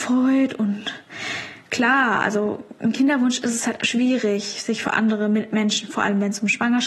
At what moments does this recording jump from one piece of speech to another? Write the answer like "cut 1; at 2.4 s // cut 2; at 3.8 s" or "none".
cut 1; at 3.8 s